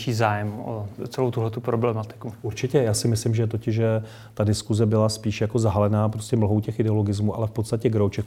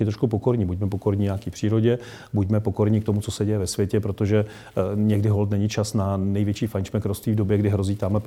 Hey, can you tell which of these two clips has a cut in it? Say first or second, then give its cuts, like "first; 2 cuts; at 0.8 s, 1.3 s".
first; 1 cut; at 1.0 s